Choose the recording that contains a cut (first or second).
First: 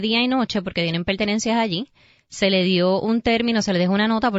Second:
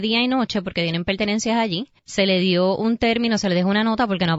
second